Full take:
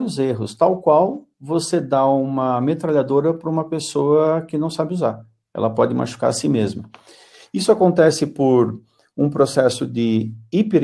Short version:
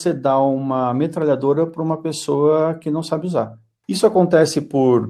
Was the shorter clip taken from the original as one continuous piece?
no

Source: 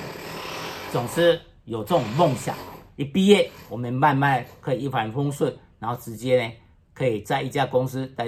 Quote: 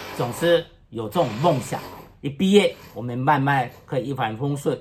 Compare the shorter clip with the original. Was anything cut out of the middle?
no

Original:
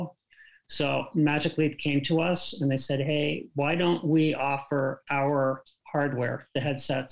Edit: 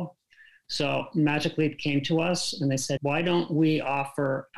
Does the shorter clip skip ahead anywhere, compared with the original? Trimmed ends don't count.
yes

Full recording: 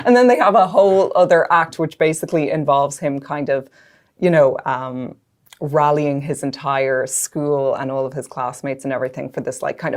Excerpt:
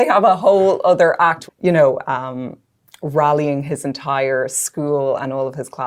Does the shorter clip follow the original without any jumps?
no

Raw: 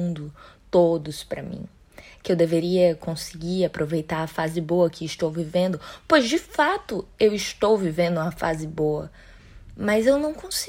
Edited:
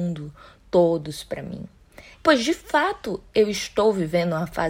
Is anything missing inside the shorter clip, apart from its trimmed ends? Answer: yes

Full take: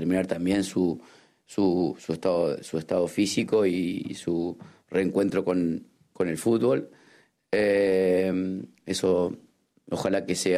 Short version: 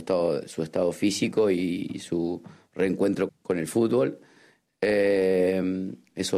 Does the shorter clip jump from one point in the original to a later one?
yes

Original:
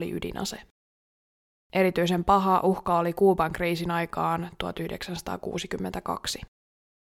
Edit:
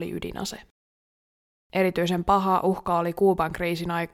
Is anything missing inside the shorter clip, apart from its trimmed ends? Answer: no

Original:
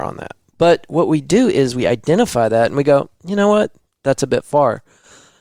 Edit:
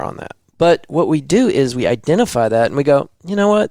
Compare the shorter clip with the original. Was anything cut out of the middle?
no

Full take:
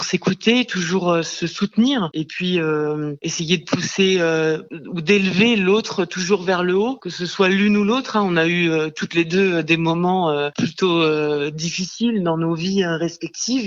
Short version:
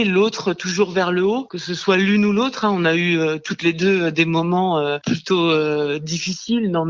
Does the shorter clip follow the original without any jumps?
yes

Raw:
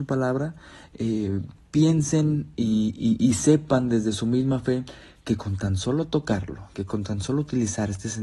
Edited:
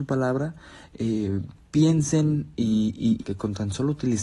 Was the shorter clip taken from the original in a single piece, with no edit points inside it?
no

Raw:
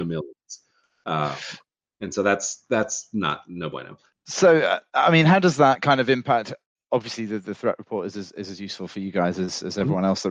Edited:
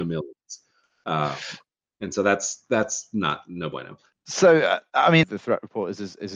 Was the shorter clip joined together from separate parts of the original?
yes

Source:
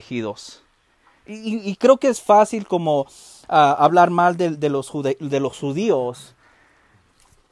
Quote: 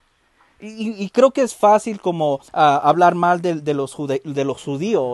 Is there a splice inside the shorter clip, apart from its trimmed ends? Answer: yes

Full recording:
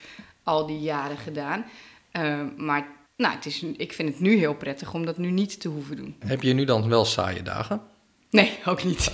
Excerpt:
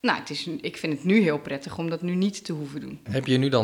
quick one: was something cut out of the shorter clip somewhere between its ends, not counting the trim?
no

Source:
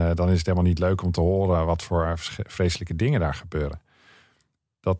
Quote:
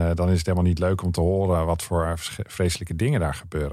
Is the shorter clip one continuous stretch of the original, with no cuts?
yes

